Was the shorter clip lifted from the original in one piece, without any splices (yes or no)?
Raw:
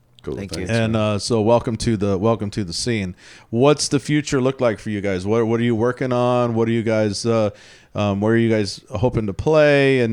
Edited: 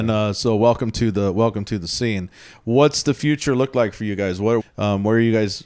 no